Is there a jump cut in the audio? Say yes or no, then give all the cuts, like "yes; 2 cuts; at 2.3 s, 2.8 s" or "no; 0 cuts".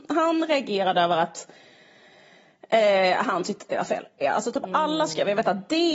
yes; 1 cut; at 4.2 s